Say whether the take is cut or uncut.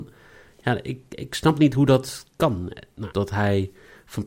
cut